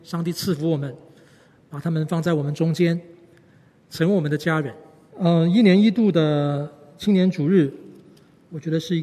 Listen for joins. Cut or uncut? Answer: cut